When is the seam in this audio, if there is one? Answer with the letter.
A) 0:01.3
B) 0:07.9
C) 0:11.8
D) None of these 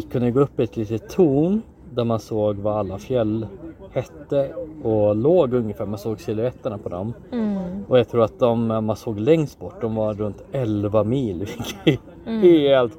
D